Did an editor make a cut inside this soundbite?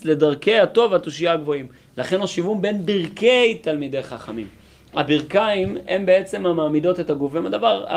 no; 0 cuts

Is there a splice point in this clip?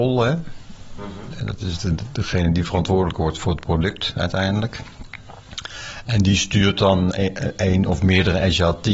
no; 0 cuts

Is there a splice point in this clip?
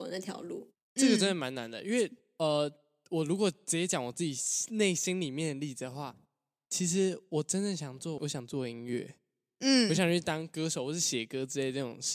yes; 1 cut; at 8.2 s

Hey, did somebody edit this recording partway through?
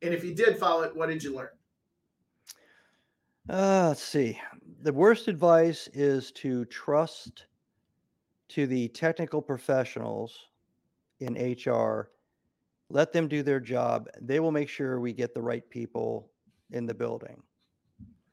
no; 0 cuts

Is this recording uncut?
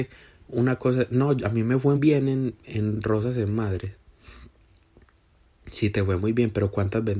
no; 1 cut; at 2.0 s

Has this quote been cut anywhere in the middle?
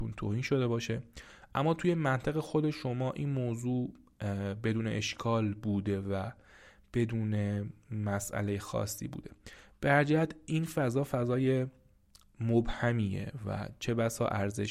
no; 0 cuts

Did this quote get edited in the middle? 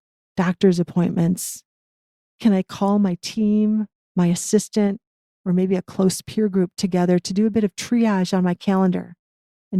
yes; 1 cut; at 2.3 s

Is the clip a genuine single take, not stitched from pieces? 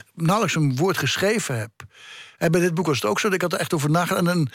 yes; 0 cuts

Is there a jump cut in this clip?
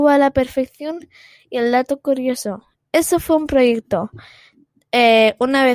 no; 0 cuts

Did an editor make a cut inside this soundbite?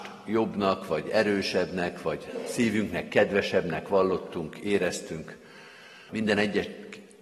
yes; 1 cut; at 6.1 s

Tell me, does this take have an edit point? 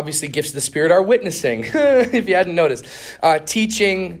no; 0 cuts

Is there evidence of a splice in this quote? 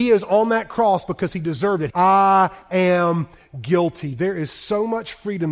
yes; 1 cut; at 1.9 s

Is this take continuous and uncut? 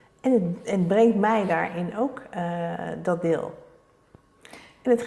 yes; 0 cuts

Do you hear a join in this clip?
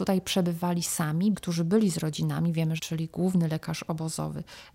yes; 2 cuts; at 1.3 s, 2.8 s

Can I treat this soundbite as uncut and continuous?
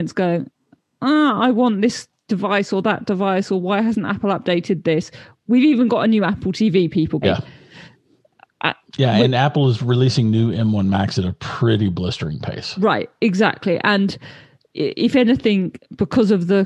no; 1 cut; at 7.2 s

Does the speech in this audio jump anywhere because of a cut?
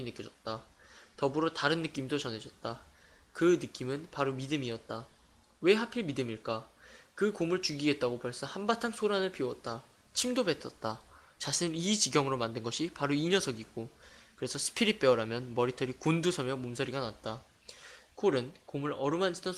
no; 0 cuts

